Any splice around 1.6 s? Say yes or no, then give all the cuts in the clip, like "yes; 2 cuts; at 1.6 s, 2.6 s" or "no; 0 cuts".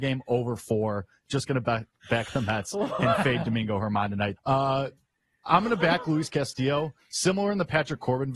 no; 1 cut; at 4.4 s